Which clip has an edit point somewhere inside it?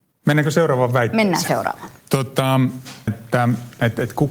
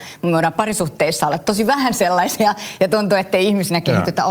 first; 1 cut; at 3.1 s

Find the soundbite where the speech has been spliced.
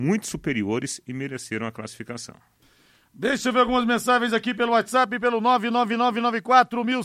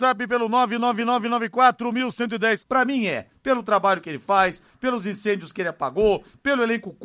second; 1 cut; at 2.6 s

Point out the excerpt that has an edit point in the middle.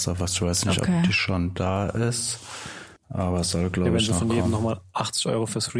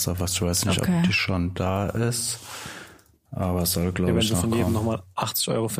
first; 1 cut; at 3.0 s

